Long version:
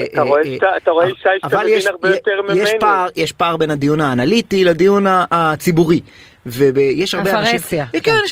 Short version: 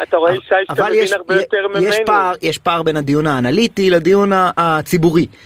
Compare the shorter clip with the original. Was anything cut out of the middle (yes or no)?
no